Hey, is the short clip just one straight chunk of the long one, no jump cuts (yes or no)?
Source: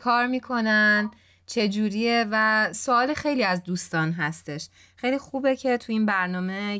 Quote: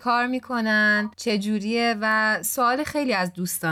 no